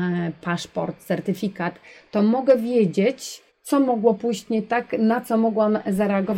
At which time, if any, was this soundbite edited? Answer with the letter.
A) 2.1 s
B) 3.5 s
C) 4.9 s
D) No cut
B